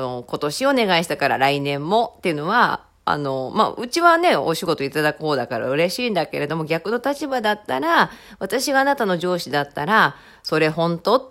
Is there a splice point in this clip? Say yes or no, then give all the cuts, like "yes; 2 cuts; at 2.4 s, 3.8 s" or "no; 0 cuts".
no; 0 cuts